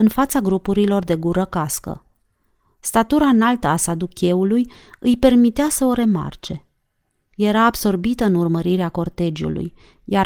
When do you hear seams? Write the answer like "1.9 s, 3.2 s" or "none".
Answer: none